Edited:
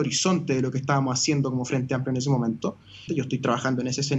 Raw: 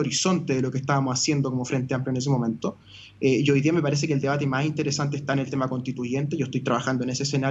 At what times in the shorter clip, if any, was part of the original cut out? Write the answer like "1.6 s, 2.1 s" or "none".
3.1 s

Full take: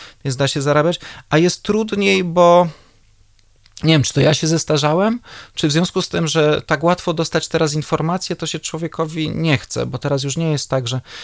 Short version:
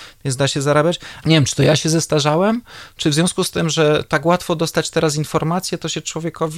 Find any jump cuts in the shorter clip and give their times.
1.2 s

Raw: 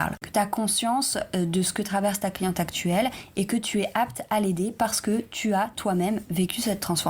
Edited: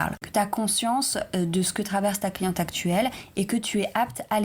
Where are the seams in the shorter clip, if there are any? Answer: none

